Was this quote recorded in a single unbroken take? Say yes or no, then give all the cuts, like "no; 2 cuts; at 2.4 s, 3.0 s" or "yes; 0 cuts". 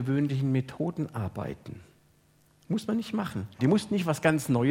no; 1 cut; at 3.6 s